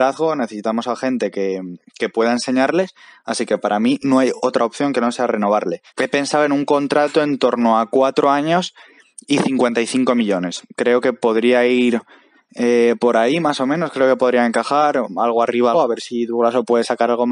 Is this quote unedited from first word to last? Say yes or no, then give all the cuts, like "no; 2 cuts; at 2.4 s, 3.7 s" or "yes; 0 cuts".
no; 2 cuts; at 5.9 s, 15.7 s